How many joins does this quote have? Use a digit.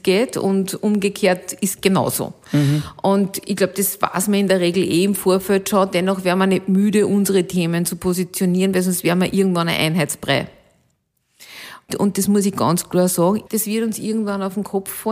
2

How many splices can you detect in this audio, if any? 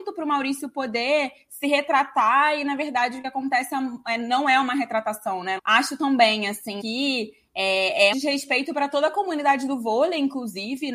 3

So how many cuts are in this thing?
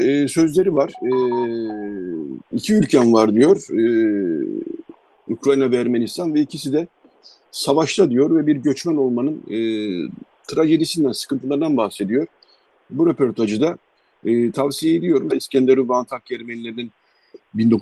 2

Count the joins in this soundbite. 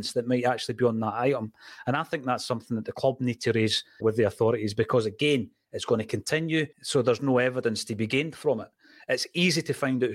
2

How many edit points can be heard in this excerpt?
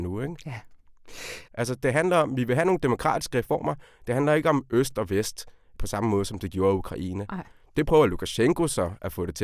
1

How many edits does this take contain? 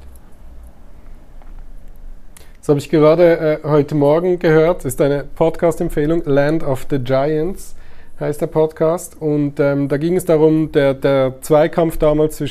0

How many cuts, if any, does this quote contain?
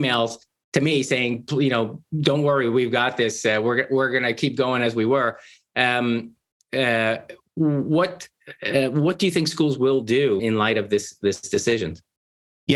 1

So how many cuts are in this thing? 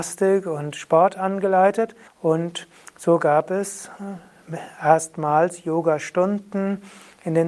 1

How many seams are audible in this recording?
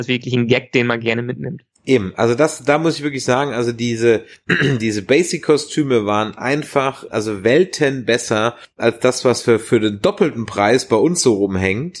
1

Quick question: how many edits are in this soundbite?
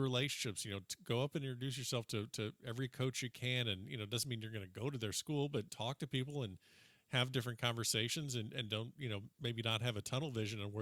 1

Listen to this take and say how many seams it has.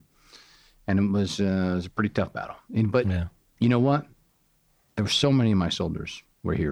0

